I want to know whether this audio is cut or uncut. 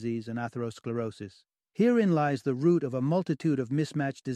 cut